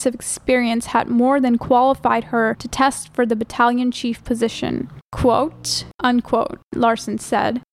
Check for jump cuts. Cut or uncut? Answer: cut